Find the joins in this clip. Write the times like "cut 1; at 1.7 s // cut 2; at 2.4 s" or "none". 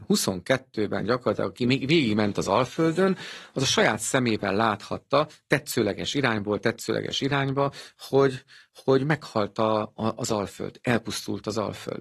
none